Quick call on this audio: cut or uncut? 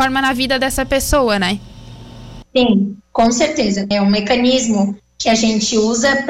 cut